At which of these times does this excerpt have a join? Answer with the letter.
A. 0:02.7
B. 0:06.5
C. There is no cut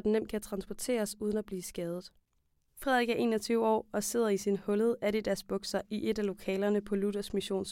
A